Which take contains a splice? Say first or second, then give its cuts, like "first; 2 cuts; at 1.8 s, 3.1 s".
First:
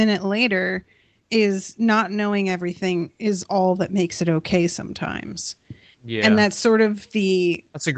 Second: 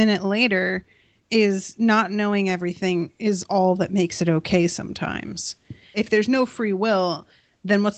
second; 1 cut; at 5.9 s